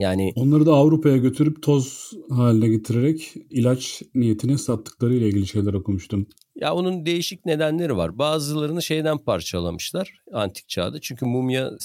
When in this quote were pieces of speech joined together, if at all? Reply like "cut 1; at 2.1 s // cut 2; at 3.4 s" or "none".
none

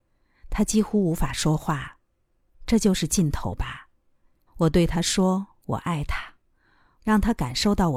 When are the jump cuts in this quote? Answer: cut 1; at 4.5 s // cut 2; at 7.0 s

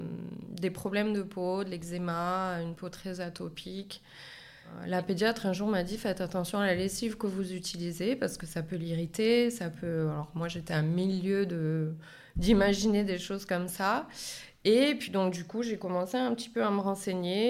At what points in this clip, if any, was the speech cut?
none

